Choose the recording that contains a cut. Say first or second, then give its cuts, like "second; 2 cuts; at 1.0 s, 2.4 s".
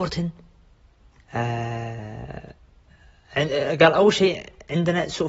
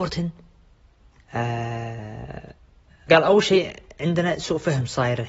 second; 1 cut; at 3.1 s